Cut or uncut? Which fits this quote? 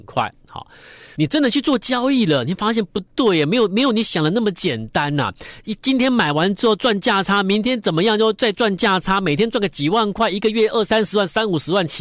cut